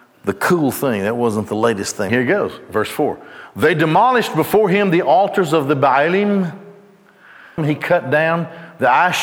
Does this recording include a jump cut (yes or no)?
yes